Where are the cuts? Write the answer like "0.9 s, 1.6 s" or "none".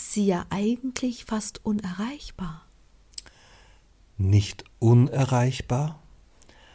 none

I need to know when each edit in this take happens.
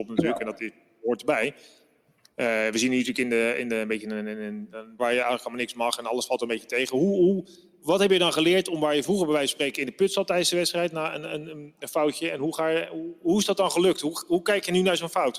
5.0 s

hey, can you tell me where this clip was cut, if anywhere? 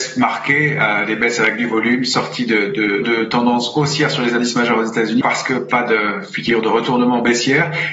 3.0 s, 5.2 s

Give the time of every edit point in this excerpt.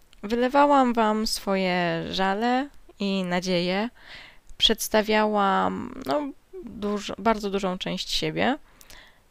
6.6 s

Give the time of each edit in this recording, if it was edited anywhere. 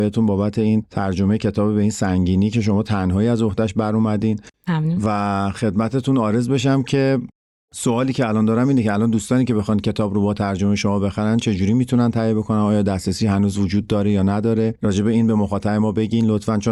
none

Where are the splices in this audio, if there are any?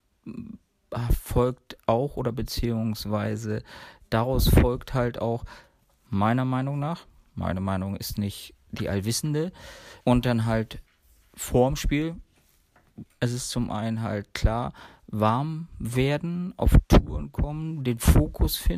10.0 s, 13.0 s

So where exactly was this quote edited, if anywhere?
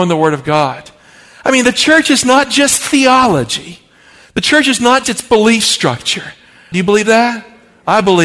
5.0 s, 6.7 s

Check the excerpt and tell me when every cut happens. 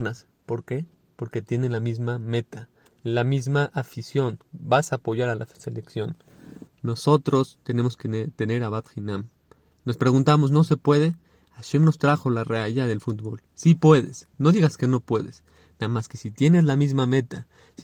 6.7 s

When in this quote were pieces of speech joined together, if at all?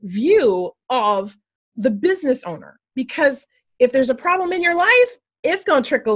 none

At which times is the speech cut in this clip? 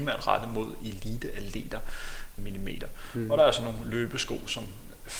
2.4 s

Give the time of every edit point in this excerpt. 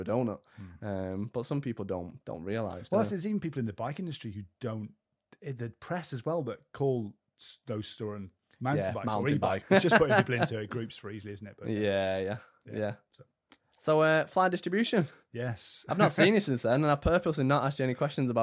9.6 s

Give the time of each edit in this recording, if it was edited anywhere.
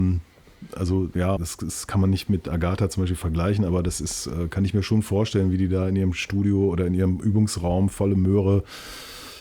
1.4 s

